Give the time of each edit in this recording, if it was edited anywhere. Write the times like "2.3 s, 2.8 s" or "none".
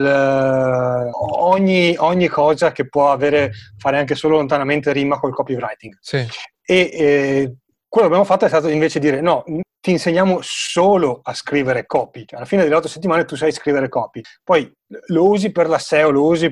none